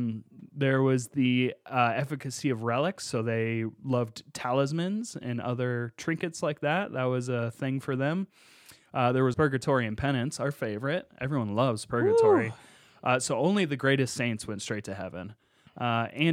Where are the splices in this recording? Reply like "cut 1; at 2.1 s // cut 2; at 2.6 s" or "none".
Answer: cut 1; at 9.3 s